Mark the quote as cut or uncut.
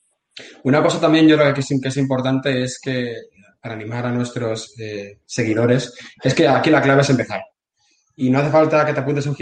uncut